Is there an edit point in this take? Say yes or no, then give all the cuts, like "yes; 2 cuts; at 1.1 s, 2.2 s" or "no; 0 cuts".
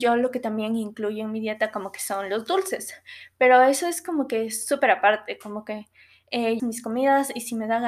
yes; 1 cut; at 6.6 s